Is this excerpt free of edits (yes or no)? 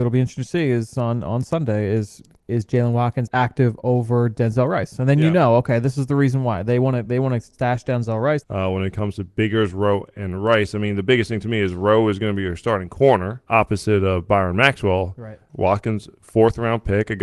no